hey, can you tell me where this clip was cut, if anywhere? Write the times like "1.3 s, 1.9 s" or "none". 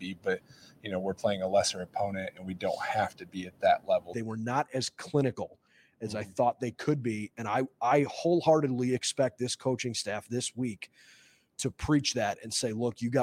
4.1 s